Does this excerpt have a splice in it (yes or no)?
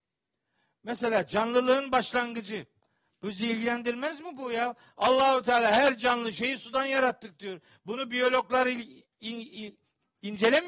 no